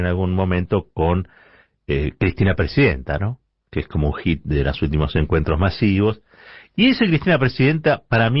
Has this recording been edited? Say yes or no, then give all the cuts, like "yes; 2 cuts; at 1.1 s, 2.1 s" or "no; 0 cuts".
no; 0 cuts